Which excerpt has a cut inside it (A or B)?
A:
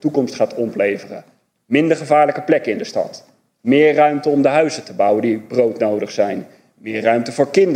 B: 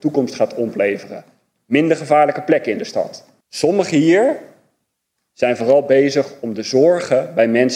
B